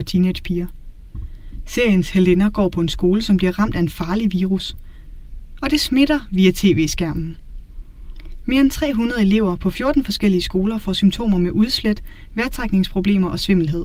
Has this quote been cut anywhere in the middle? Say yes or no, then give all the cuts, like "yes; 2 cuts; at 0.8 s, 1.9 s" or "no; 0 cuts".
no; 0 cuts